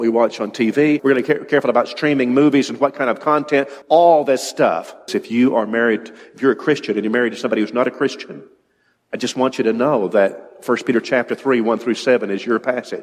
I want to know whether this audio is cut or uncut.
cut